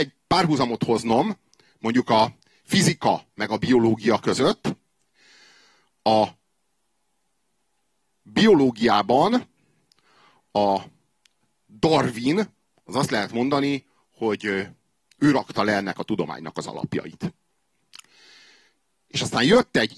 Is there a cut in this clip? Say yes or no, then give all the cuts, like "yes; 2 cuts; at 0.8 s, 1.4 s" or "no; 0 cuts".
no; 0 cuts